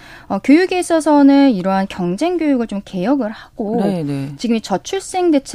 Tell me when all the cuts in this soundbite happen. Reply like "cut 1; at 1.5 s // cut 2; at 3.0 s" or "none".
cut 1; at 4.4 s

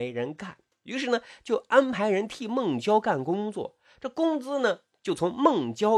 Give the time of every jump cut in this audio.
none

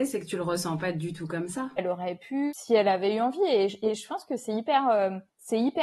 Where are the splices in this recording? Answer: cut 1; at 1.8 s

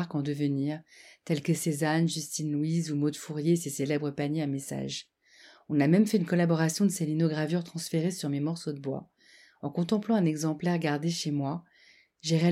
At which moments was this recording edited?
none

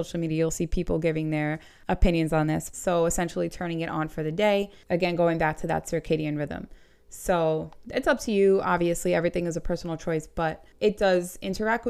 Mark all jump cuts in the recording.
cut 1; at 2.7 s

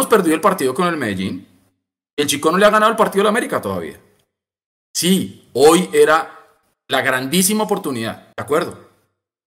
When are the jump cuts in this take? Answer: cut 1; at 8.3 s

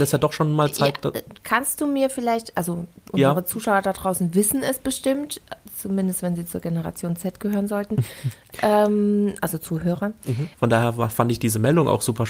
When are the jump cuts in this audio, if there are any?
cut 1; at 10.5 s

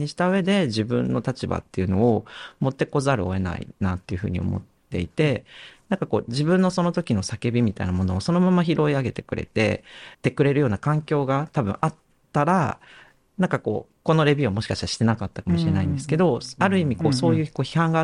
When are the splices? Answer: cut 1; at 10.1 s

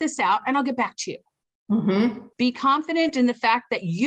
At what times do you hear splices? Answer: cut 1; at 2.3 s

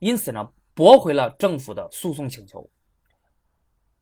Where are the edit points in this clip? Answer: none

